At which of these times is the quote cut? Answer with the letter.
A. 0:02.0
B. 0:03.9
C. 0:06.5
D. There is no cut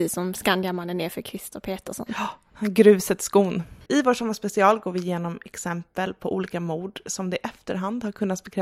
B